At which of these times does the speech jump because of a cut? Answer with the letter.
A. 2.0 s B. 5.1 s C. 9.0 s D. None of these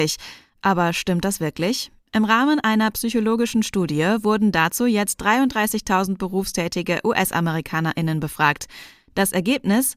D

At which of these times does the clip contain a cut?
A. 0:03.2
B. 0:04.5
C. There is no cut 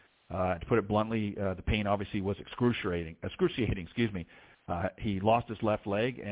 C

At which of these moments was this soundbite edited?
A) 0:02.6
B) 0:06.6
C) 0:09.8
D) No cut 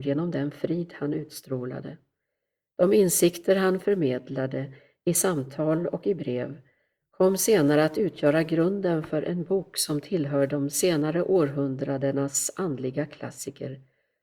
D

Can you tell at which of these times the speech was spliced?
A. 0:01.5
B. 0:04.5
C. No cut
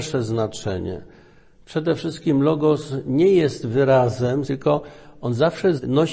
B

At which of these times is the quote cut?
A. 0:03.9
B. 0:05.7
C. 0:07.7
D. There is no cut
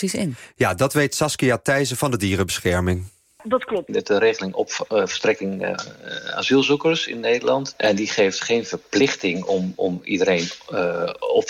A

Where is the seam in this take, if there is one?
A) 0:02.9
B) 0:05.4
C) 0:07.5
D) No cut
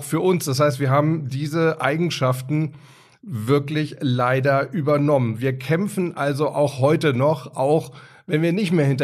D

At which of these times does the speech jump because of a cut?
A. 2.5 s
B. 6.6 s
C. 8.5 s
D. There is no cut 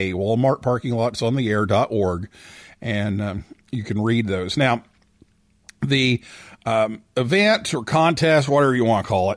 D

